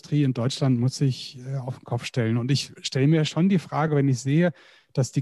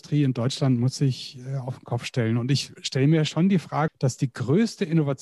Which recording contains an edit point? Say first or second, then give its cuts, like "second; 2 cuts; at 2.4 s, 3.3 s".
second; 1 cut; at 3.9 s